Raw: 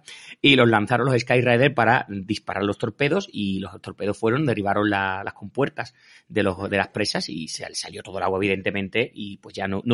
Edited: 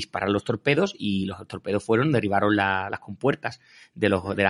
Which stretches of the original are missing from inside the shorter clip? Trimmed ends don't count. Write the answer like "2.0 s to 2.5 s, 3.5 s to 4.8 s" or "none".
none